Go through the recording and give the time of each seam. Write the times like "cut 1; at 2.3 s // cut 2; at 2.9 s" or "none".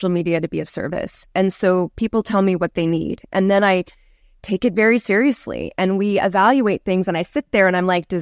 none